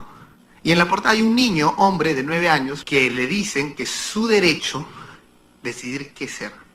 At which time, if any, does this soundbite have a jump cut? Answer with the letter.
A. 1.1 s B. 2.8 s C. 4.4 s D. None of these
B